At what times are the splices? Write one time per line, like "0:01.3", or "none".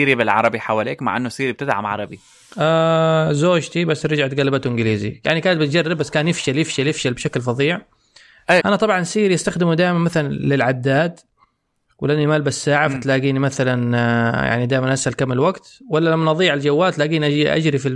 0:08.6